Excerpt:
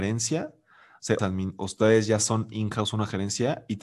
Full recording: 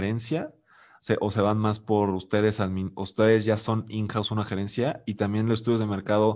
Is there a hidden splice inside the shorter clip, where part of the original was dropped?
yes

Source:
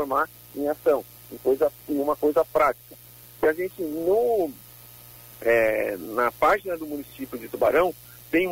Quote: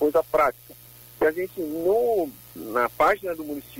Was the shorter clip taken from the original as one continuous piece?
no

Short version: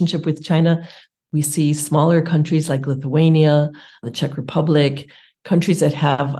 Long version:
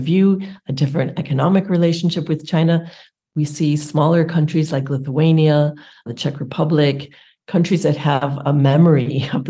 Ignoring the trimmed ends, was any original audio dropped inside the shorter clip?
no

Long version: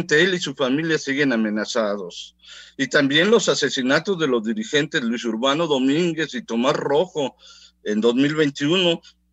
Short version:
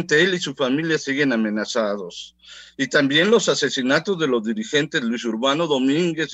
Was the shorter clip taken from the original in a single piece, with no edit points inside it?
yes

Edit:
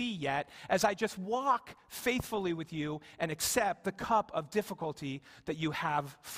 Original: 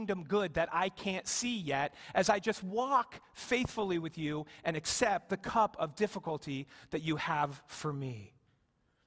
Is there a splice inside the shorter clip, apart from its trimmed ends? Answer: no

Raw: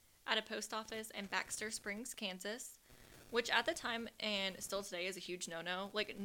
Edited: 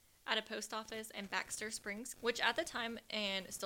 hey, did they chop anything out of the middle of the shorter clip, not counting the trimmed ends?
yes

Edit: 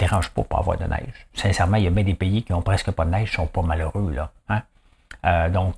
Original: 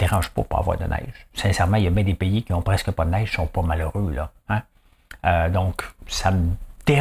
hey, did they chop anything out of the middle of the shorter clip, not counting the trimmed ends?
no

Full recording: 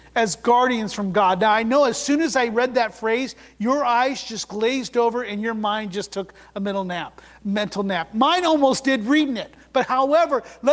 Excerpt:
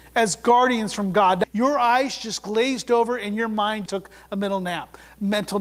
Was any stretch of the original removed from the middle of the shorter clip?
yes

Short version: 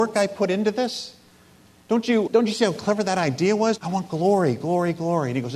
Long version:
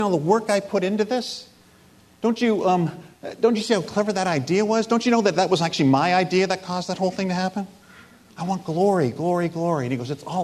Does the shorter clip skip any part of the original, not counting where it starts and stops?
yes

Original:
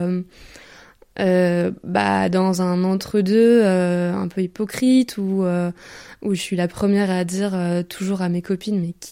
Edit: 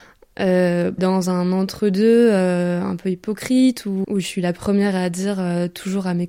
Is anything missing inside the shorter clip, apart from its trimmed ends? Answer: yes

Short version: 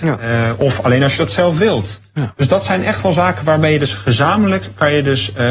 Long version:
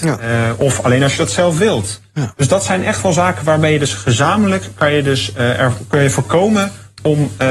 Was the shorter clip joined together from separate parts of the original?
no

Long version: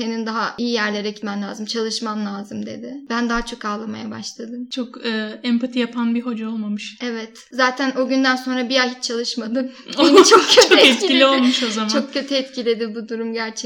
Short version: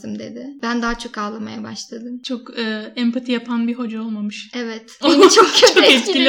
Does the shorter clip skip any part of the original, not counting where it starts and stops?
yes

